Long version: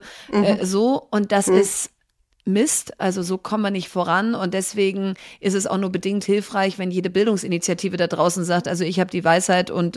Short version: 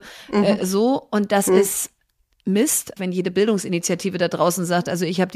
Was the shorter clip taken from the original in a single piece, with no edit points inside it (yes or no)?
no